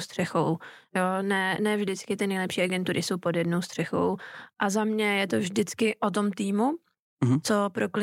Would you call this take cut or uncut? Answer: uncut